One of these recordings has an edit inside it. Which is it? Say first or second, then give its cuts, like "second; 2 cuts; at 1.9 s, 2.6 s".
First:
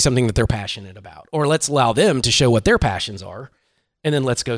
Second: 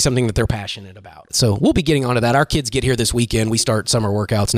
second; 1 cut; at 1.3 s